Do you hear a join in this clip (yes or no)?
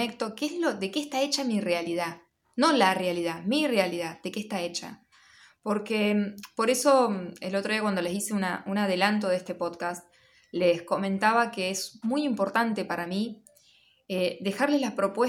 no